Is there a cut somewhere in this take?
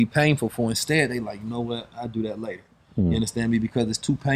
no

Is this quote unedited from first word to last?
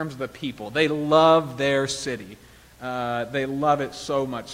yes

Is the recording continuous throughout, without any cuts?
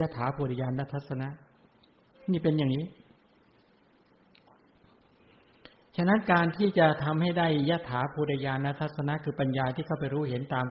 yes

